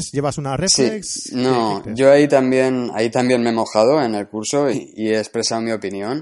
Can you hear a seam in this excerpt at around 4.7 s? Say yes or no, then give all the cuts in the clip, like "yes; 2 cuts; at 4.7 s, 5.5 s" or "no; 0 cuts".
yes; 1 cut; at 4.7 s